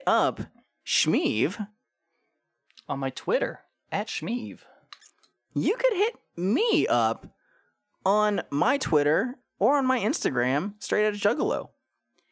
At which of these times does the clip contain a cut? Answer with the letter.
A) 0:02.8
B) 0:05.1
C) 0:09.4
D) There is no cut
C